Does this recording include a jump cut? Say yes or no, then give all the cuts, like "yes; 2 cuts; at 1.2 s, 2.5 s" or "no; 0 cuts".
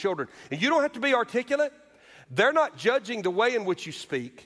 no; 0 cuts